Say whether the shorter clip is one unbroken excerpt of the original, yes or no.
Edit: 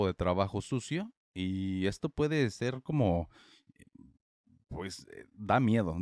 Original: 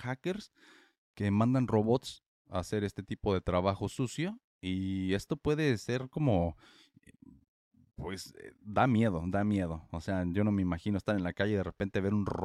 yes